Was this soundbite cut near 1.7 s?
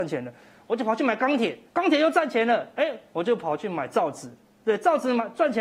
yes; 1 cut; at 1.7 s

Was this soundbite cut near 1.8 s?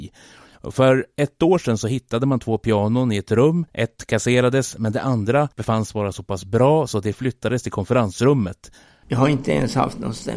no; 3 cuts; at 3.7 s, 5.5 s, 9.0 s

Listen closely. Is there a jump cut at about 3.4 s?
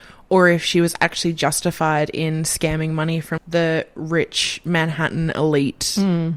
yes; 1 cut; at 3.4 s

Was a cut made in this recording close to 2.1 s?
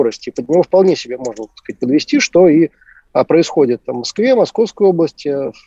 no; 0 cuts

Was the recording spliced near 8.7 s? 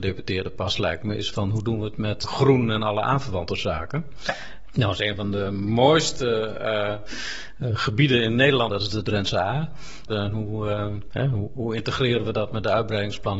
yes; 2 cuts; at 8.7 s, 10.1 s

